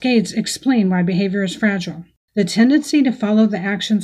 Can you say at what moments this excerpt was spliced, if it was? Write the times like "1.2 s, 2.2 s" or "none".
2.2 s